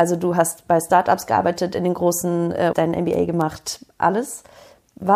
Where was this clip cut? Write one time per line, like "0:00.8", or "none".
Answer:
0:02.7